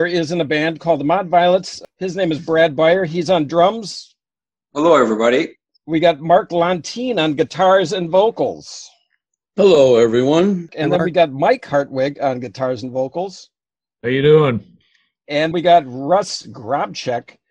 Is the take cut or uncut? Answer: cut